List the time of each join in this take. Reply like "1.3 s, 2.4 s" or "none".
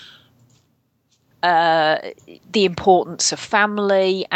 1.3 s, 2.4 s

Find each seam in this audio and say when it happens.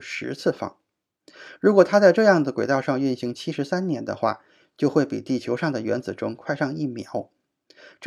none

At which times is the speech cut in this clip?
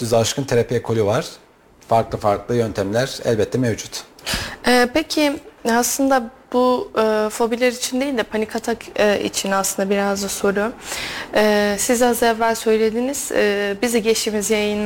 none

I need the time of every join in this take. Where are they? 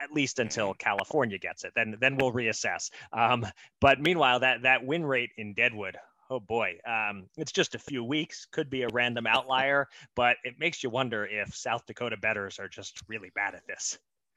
none

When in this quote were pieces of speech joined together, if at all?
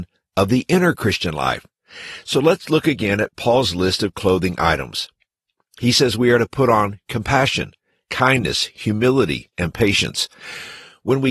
9.5 s

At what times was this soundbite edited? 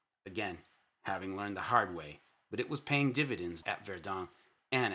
3.6 s

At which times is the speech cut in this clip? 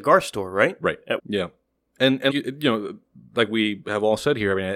1.2 s, 2.3 s

